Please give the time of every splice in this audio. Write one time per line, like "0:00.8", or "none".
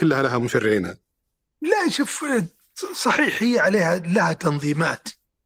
0:01.5